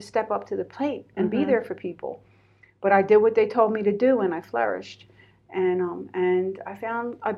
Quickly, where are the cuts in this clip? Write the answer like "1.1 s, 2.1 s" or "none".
none